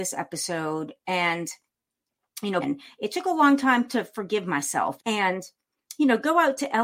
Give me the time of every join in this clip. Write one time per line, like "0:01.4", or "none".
0:02.6
0:05.0